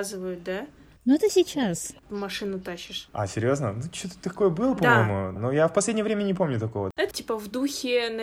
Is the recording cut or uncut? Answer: cut